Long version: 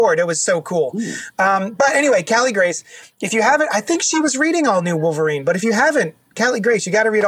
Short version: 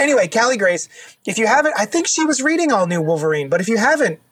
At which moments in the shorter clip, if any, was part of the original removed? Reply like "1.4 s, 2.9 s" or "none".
none